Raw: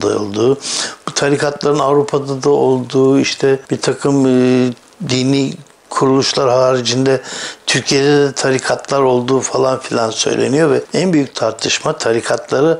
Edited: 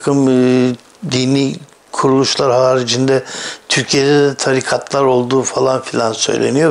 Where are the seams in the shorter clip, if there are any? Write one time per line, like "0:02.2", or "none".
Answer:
none